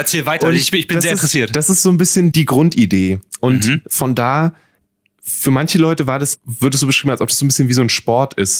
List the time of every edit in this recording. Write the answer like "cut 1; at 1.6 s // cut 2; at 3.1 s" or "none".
cut 1; at 2.3 s // cut 2; at 3.8 s // cut 3; at 6.4 s